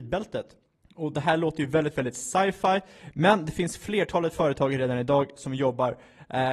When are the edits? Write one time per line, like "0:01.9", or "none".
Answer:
none